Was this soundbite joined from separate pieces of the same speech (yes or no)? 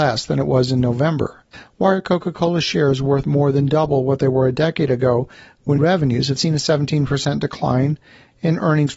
yes